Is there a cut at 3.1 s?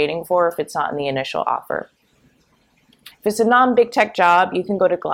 yes; 1 cut; at 3.1 s

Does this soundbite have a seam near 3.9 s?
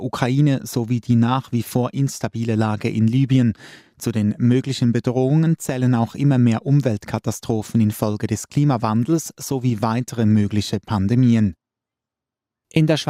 no; 0 cuts

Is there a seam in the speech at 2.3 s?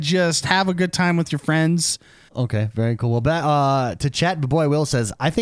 yes; 1 cut; at 2.3 s

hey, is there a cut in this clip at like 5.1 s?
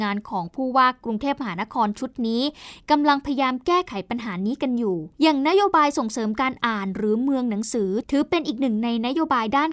yes; 1 cut; at 5.1 s

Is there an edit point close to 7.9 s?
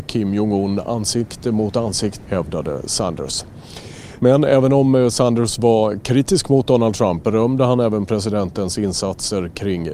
no; 2 cuts; at 2.3 s, 4.2 s

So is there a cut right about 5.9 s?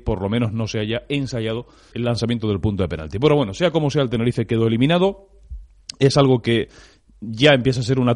no; 1 cut; at 1.9 s

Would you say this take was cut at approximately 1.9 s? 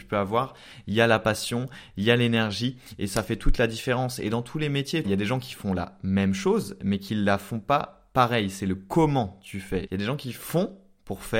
no; 2 cuts; at 5.0 s, 9.9 s

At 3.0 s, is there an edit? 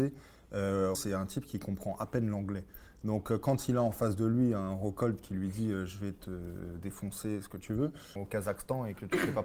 no; 2 cuts; at 0.9 s, 8.2 s

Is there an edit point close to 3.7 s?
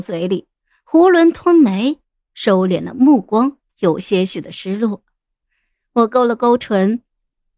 yes; 2 cuts; at 2.3 s, 3.7 s

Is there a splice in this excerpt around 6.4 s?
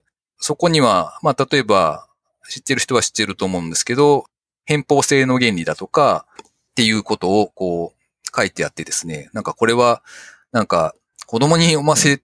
yes; 1 cut; at 6.4 s

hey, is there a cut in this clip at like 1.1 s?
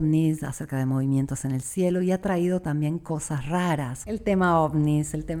no; 1 cut; at 4.0 s

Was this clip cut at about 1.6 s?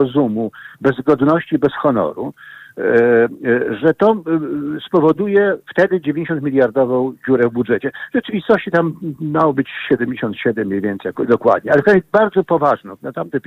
no; 2 cuts; at 3.8 s, 11.1 s

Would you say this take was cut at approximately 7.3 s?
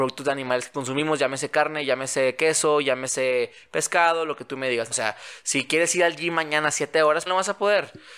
yes; 2 cuts; at 4.9 s, 7.3 s

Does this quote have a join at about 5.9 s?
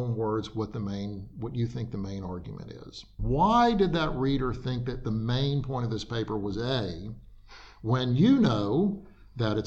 no; 1 cut; at 3.2 s

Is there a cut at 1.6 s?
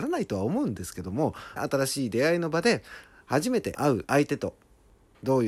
yes; 1 cut; at 1.6 s

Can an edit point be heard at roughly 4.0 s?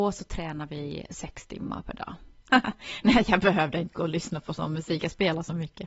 no; 1 cut; at 2.5 s

